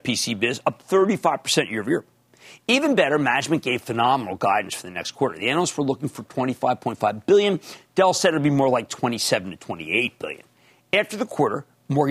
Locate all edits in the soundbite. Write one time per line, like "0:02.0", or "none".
none